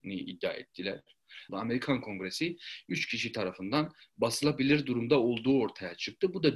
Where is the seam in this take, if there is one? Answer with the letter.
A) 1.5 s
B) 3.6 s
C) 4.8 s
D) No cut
A